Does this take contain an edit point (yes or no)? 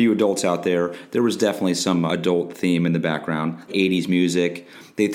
yes